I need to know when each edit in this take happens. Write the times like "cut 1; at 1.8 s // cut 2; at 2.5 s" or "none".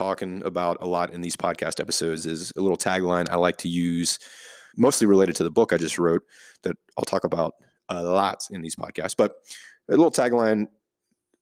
cut 1; at 4.7 s